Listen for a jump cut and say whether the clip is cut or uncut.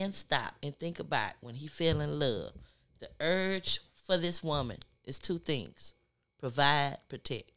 uncut